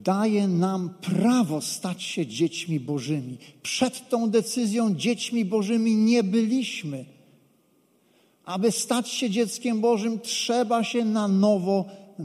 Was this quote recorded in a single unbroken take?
yes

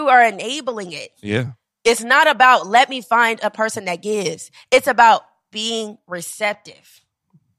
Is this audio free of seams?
yes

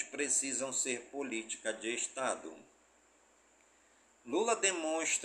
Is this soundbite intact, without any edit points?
yes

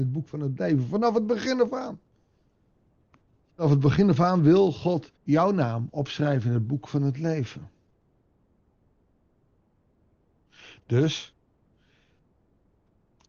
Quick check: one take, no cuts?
no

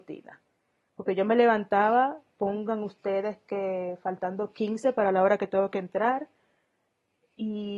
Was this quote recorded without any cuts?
yes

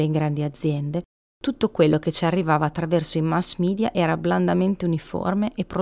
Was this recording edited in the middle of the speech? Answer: no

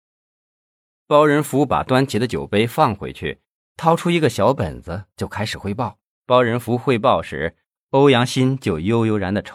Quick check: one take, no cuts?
no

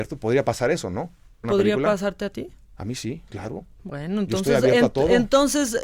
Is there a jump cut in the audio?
yes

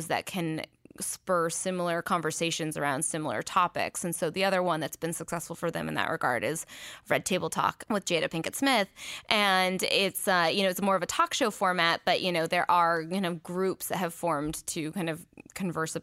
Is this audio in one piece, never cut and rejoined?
yes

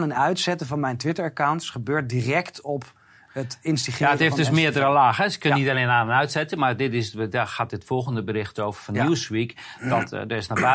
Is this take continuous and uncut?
yes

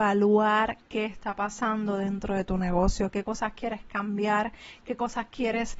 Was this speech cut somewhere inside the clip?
no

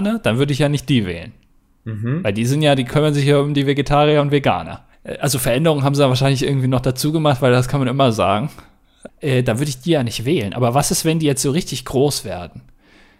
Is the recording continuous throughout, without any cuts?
no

